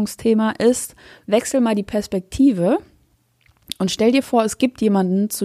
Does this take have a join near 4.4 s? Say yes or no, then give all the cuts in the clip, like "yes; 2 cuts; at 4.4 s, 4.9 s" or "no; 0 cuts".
no; 0 cuts